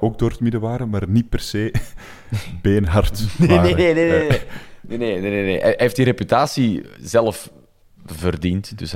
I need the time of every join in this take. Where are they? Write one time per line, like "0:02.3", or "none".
none